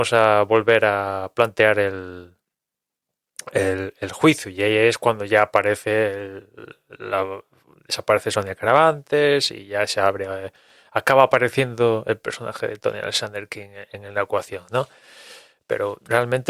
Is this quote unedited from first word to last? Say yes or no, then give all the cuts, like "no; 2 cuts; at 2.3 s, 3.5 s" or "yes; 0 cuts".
yes; 0 cuts